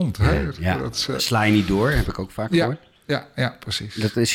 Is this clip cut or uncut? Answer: uncut